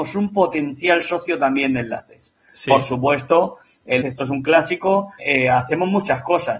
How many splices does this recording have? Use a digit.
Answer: 2